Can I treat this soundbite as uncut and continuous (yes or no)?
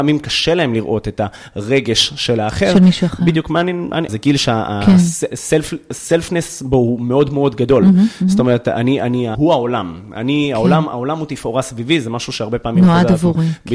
no